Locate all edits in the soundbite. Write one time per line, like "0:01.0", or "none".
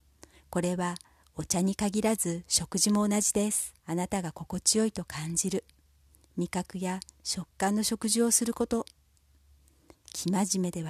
0:03.8